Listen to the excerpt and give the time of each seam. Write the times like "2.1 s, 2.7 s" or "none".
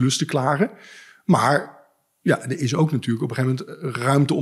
none